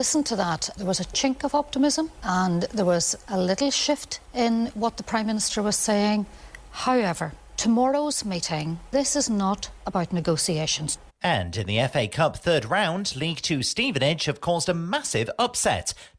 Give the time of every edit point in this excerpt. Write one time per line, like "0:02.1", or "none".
0:11.1